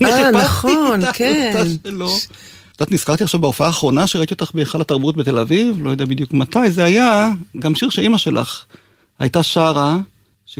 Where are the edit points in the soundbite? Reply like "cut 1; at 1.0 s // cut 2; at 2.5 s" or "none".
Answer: cut 1; at 2.7 s // cut 2; at 7.5 s